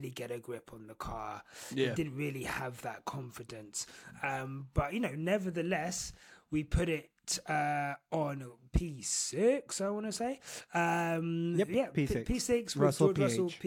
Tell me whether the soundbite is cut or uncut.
uncut